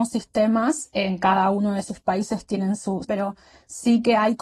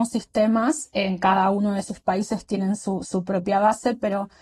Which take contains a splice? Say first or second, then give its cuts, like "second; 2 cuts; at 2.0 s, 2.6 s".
first; 1 cut; at 3.0 s